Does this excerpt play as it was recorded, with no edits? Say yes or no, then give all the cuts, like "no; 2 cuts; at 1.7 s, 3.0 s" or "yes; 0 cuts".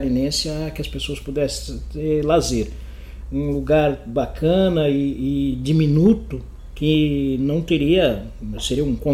yes; 0 cuts